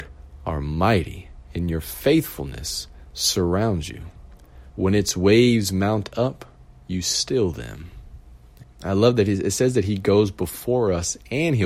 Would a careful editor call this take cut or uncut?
cut